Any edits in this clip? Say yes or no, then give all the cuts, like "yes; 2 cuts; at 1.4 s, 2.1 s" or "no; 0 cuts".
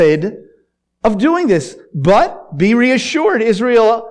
no; 0 cuts